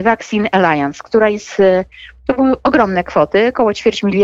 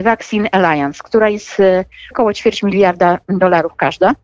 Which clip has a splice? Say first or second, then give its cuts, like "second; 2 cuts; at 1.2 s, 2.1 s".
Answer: second; 1 cut; at 2.1 s